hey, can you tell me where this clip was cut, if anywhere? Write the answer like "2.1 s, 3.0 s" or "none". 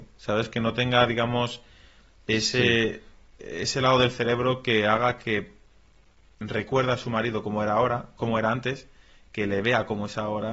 none